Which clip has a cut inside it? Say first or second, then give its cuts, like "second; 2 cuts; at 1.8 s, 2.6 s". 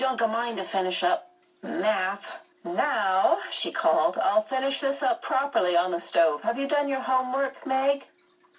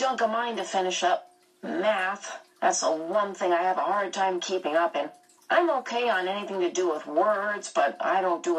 first; 1 cut; at 2.5 s